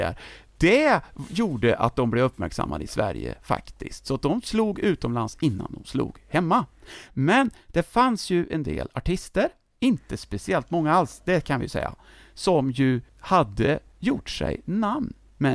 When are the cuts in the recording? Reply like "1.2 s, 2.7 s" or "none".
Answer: none